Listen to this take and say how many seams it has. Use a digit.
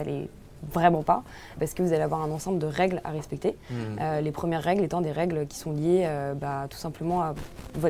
1